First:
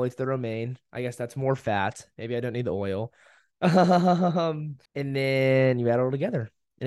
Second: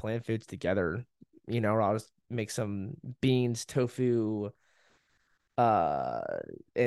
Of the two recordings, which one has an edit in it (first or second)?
first